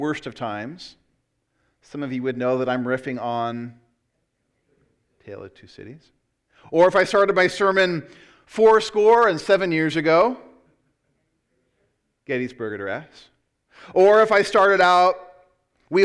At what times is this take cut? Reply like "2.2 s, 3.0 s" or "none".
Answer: none